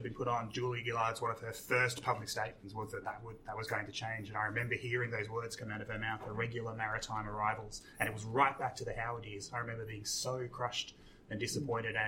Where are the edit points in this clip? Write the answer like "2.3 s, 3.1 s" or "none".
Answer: none